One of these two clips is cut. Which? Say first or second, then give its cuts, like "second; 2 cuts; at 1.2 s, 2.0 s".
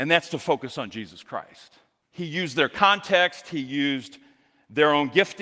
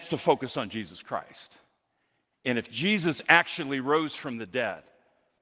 first; 1 cut; at 2.0 s